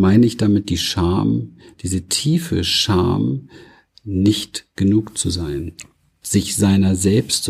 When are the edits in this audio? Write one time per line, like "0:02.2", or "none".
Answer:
none